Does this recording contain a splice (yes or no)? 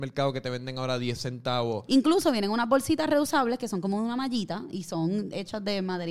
yes